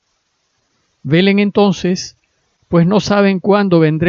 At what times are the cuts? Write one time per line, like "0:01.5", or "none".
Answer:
none